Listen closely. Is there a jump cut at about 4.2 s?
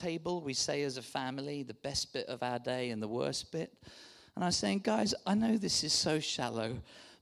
no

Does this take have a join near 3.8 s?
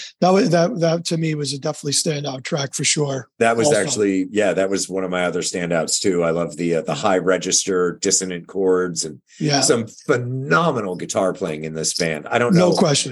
no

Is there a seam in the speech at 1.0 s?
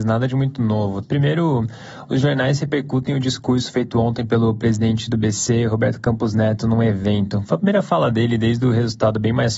yes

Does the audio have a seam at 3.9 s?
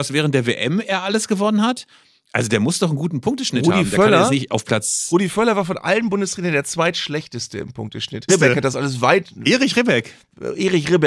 no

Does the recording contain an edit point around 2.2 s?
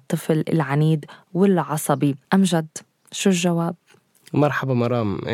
yes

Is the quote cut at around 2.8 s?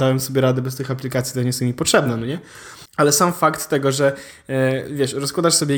yes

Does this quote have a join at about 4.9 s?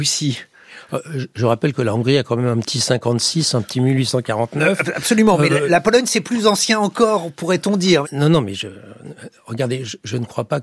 no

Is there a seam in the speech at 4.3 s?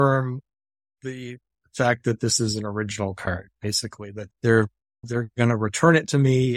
yes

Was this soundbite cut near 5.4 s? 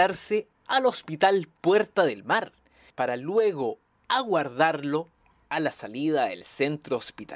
no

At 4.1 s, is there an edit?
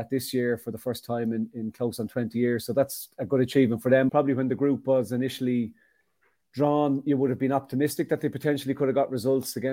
yes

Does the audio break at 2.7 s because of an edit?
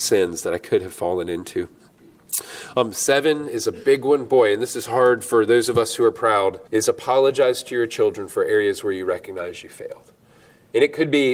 no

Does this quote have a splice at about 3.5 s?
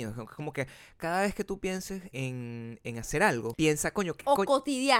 yes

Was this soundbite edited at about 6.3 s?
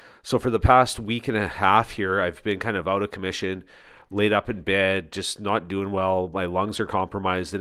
no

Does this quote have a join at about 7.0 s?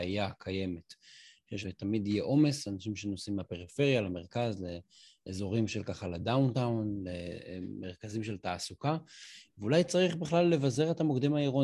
no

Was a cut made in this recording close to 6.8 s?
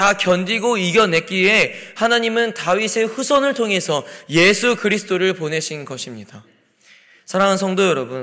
no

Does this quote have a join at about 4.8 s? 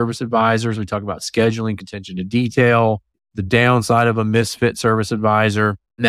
no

